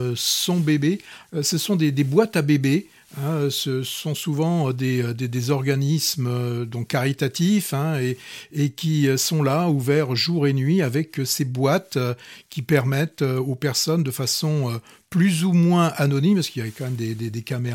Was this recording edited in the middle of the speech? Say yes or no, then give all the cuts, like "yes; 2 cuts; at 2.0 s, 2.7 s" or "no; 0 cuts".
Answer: yes; 1 cut; at 1.2 s